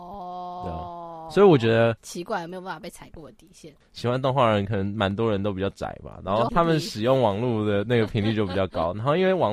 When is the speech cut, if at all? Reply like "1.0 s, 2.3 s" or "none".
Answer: 2.0 s, 3.8 s, 6.5 s